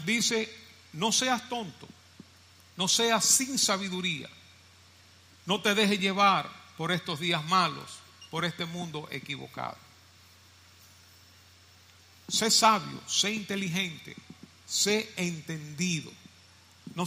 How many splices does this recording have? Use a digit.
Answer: 0